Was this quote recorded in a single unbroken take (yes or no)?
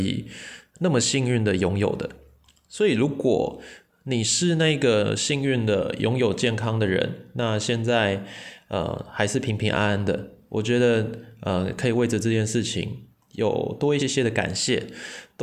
no